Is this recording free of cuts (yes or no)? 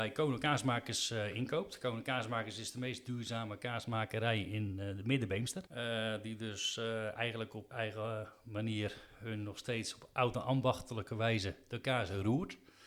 no